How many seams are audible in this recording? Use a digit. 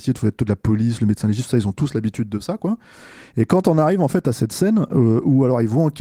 0